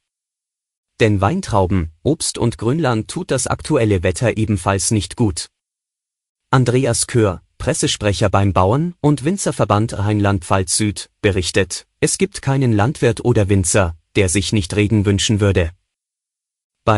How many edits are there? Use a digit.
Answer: 0